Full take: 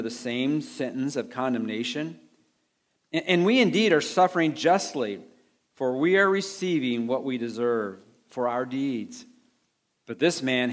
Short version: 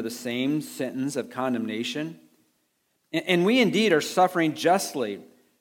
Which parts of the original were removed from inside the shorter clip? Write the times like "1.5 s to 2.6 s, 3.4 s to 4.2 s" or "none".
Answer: none